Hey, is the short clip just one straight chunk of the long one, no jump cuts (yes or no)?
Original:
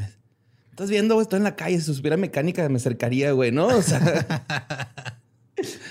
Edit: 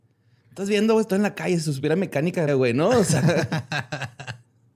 no